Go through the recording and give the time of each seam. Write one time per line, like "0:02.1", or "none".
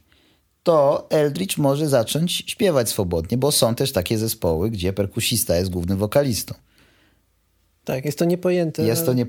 none